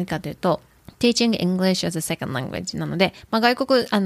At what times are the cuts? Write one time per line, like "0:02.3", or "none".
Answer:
none